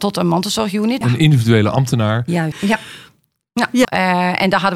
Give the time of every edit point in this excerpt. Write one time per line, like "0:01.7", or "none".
0:01.0
0:02.5
0:03.8